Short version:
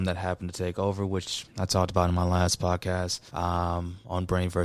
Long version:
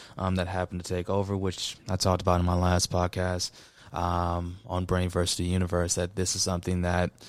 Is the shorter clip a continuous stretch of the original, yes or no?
no